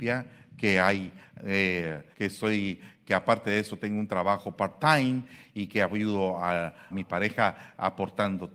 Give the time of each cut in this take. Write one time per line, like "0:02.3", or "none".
0:02.1
0:06.9

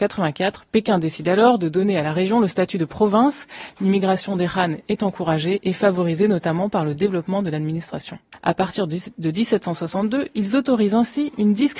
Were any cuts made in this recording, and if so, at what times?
0:03.7
0:08.3

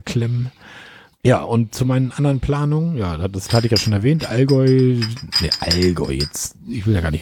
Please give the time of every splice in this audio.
0:01.1

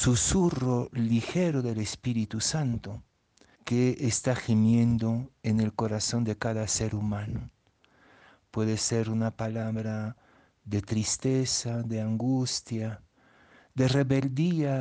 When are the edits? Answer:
0:03.5

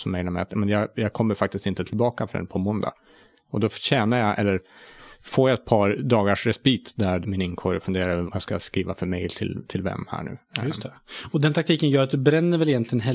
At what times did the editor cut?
0:07.2
0:08.3

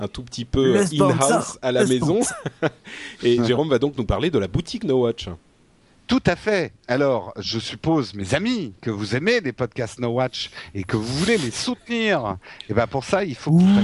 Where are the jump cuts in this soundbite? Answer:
none

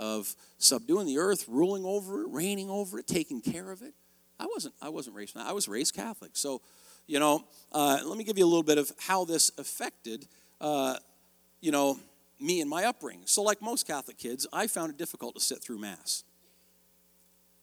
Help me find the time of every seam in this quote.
none

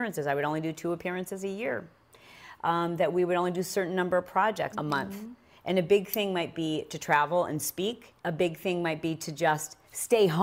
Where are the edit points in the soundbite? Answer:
0:04.7
0:08.2

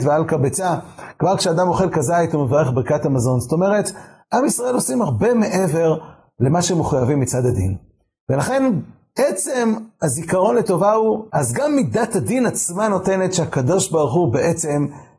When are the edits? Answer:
0:11.3

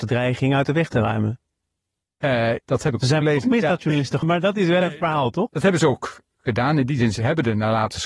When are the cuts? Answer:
0:02.6
0:04.2
0:05.5

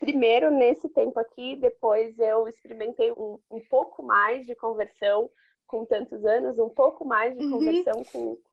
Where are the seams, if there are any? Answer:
0:03.1

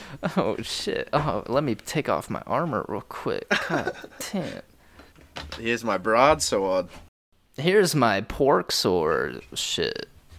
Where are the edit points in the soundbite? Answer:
none

